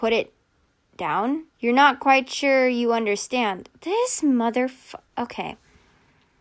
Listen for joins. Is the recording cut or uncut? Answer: cut